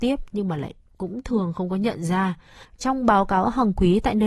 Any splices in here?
yes; 1 cut; at 2.6 s

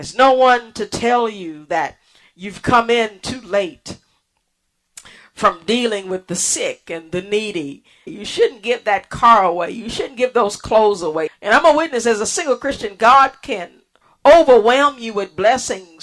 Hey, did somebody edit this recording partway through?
yes; 2 cuts; at 8.1 s, 11.3 s

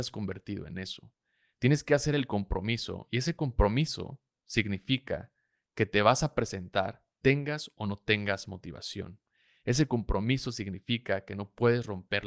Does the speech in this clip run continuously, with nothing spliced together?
yes; 0 cuts

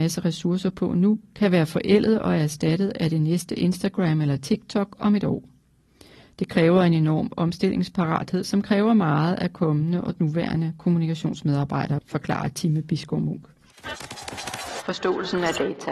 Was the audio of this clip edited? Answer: no; 0 cuts

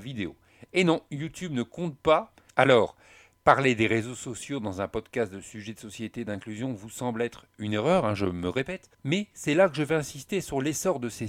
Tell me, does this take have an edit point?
yes; 2 cuts; at 2.5 s, 8.9 s

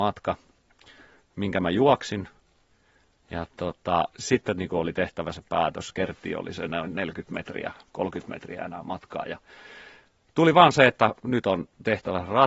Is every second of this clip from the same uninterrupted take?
yes; 0 cuts

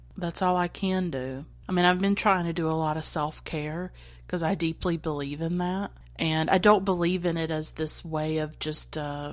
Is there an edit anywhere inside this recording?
no; 0 cuts

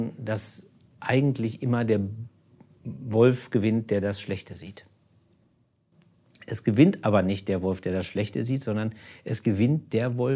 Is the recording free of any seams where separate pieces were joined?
yes; 0 cuts

